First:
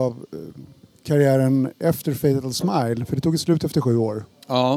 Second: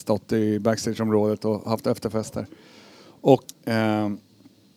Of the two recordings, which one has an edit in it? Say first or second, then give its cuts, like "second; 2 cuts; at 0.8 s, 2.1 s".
second; 1 cut; at 3.4 s